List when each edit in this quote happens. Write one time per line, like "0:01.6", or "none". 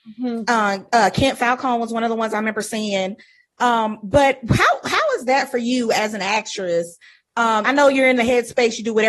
0:07.6